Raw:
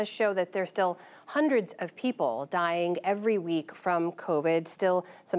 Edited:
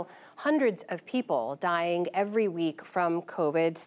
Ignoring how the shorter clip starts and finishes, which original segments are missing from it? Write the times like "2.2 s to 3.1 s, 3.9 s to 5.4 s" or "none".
none